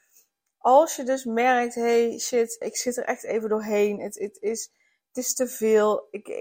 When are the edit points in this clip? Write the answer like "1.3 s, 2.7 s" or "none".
2.6 s